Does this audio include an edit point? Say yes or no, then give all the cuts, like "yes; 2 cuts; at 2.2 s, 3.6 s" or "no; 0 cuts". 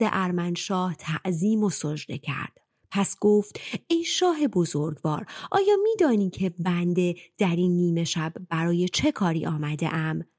no; 0 cuts